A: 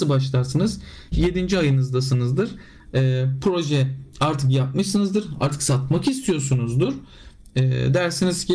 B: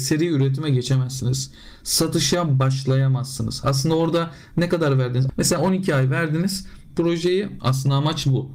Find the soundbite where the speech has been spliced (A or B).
B